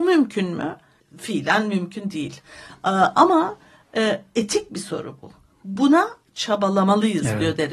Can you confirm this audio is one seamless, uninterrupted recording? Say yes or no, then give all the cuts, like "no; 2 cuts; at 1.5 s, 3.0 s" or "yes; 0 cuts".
no; 1 cut; at 1.0 s